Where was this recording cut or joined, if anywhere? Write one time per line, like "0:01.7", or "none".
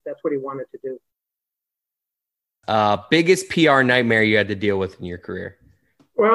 0:02.6